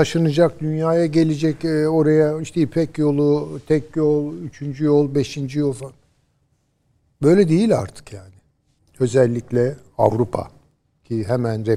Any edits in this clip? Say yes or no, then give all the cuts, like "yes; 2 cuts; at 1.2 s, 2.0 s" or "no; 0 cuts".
yes; 1 cut; at 8.8 s